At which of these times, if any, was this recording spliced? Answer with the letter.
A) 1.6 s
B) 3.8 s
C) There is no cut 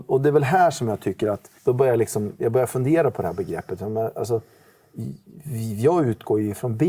A